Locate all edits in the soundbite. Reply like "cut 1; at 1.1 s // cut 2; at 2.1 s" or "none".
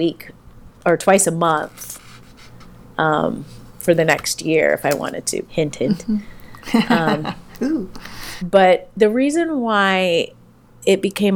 cut 1; at 5.5 s // cut 2; at 8.4 s